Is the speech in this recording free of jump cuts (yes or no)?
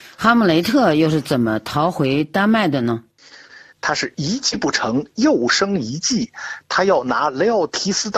no